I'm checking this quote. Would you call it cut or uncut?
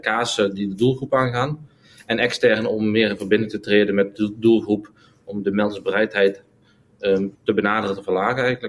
cut